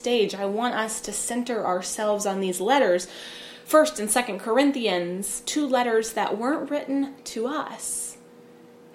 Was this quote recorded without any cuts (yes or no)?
yes